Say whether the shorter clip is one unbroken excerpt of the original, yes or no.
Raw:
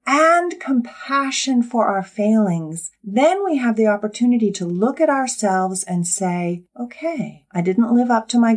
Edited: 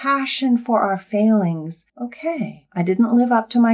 no